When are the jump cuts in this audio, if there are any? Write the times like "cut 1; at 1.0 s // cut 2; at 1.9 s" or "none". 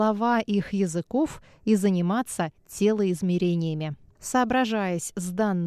cut 1; at 4.1 s